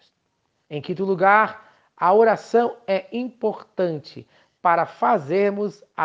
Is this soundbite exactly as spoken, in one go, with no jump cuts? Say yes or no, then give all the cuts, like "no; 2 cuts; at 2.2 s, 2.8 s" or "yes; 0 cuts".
yes; 0 cuts